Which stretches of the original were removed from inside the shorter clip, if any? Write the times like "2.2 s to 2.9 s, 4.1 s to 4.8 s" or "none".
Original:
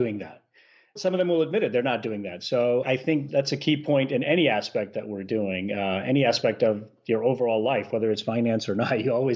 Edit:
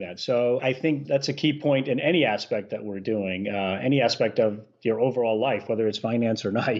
none